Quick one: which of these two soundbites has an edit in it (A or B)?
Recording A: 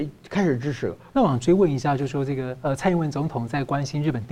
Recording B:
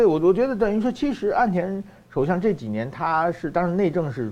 A